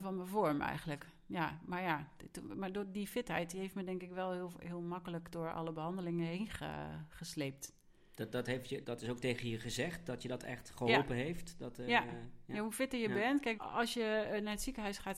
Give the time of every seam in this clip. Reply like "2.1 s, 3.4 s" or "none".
8.8 s, 13.6 s